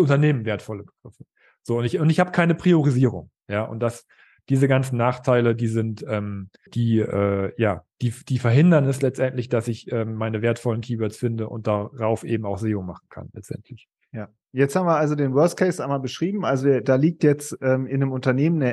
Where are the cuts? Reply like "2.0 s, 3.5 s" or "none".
6.7 s